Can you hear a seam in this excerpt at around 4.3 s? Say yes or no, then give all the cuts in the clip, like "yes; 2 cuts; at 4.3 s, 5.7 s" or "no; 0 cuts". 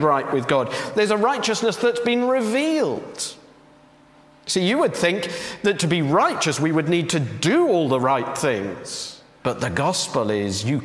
no; 1 cut; at 9.4 s